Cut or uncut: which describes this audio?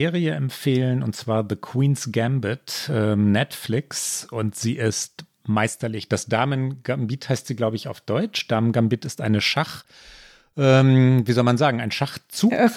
uncut